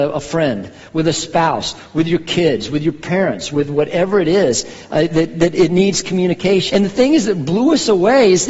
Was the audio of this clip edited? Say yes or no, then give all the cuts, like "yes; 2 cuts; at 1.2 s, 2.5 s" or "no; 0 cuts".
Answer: yes; 1 cut; at 6.7 s